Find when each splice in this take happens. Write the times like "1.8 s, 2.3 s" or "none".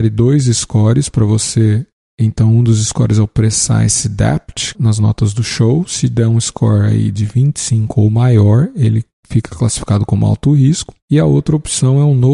4.7 s